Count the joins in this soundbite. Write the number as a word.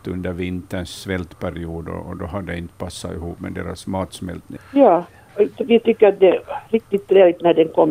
one